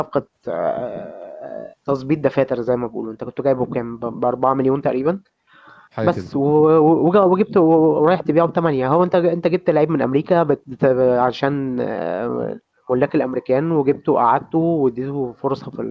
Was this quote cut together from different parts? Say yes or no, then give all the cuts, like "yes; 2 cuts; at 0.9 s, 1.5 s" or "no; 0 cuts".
no; 0 cuts